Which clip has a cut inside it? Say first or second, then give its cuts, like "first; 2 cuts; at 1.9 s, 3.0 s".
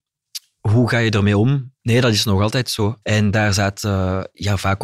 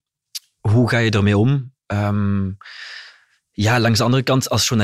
first; 2 cuts; at 1.8 s, 3.0 s